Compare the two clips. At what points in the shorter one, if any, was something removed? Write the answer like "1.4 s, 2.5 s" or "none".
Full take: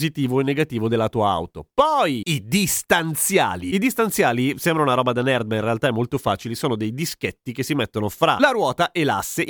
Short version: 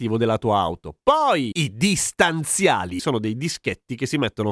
3.0 s

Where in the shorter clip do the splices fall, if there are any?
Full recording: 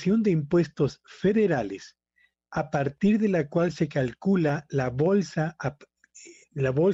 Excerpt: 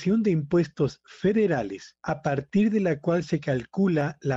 2.0 s

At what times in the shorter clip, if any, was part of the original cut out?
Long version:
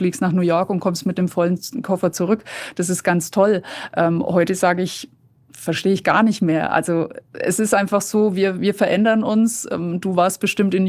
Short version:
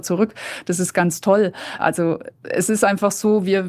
1.8 s

